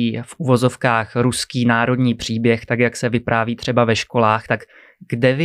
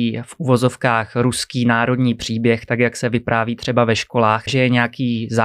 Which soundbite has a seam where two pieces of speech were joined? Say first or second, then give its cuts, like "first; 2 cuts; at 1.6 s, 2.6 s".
second; 1 cut; at 4.5 s